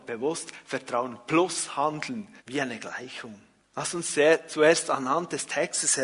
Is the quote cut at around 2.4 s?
yes; 2 cuts; at 2.4 s, 3.6 s

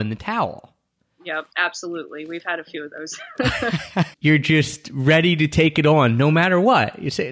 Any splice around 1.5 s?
yes; 2 cuts; at 1.5 s, 4.1 s

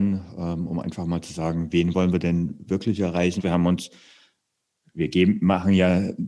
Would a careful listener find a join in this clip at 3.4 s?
yes; 1 cut; at 3.4 s

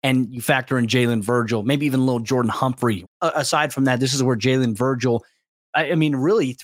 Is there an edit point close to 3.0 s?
yes; 1 cut; at 3.0 s

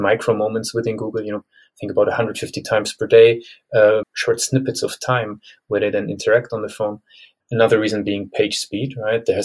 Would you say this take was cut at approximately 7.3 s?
no; 2 cuts; at 1.4 s, 4.0 s

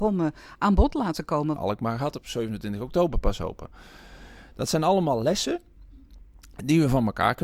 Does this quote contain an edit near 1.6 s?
yes; 1 cut; at 1.6 s

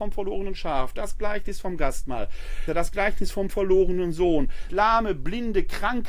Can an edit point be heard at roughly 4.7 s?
yes; 2 cuts; at 2.7 s, 4.7 s

